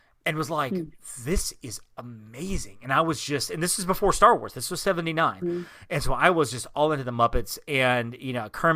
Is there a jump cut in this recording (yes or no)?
yes